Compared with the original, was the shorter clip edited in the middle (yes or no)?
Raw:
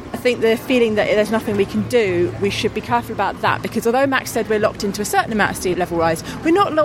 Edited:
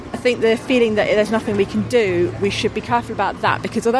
no